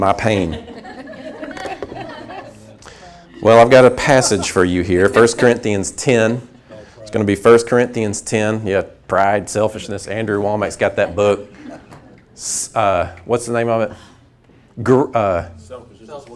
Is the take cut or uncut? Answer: uncut